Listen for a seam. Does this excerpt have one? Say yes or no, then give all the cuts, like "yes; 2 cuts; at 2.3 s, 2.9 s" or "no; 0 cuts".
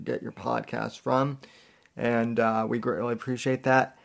no; 0 cuts